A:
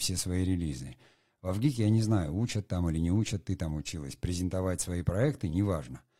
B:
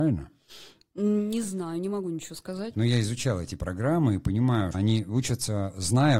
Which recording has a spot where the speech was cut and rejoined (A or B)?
B